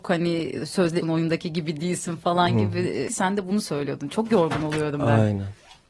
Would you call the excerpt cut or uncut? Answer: cut